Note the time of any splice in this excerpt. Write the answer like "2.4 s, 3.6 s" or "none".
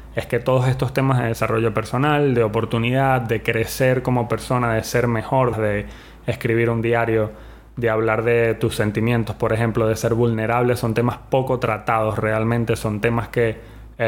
5.5 s